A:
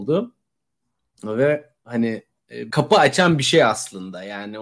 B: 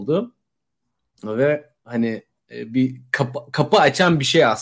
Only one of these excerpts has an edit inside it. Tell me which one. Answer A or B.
A